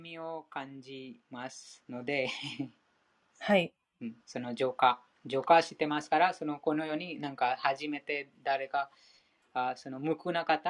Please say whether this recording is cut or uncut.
cut